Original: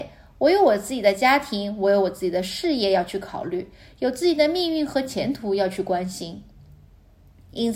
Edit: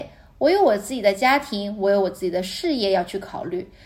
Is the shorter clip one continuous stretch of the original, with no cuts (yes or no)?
yes